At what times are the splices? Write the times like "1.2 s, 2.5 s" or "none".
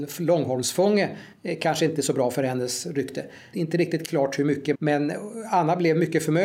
3.5 s, 4.7 s